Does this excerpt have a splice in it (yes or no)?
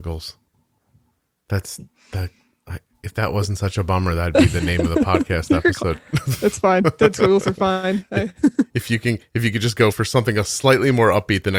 no